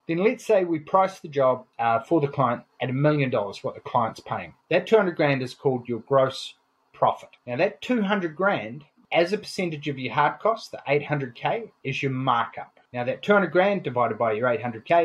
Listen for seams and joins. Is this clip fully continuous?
no; 1 cut; at 4.6 s

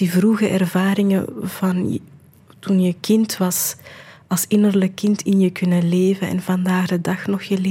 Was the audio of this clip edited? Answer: no; 0 cuts

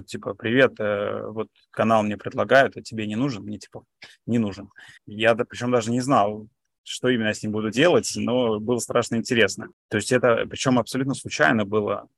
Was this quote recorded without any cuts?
no; 2 cuts; at 5.0 s, 9.7 s

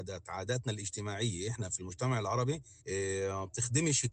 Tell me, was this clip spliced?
yes; 1 cut; at 2.8 s

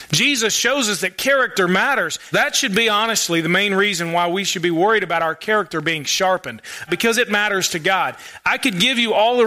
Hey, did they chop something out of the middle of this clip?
yes; 2 cuts; at 2.3 s, 6.9 s

